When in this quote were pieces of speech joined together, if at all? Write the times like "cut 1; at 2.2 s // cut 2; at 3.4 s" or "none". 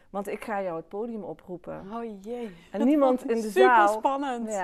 none